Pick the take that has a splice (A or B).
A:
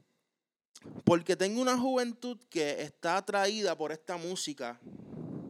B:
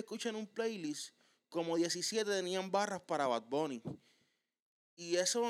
A